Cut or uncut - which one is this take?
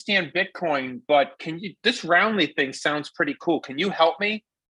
uncut